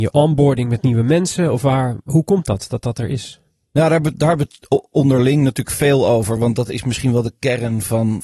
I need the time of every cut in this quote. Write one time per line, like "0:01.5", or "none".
none